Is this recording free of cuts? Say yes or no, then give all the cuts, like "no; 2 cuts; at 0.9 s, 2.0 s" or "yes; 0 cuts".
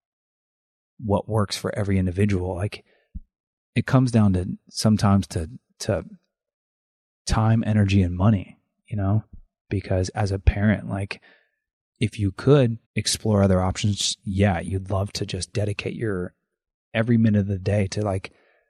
no; 1 cut; at 12.8 s